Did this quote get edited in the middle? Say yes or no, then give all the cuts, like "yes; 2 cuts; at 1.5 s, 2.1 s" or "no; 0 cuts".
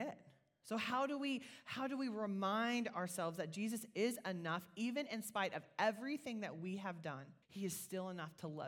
yes; 1 cut; at 7.4 s